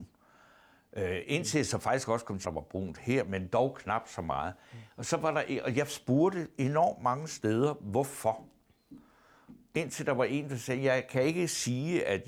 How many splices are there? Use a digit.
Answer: 1